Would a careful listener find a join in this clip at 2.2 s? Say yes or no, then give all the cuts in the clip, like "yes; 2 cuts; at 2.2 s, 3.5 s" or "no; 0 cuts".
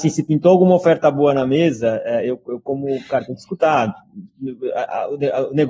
no; 0 cuts